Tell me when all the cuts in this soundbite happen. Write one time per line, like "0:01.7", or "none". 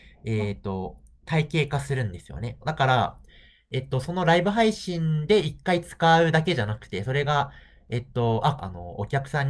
0:02.6
0:08.6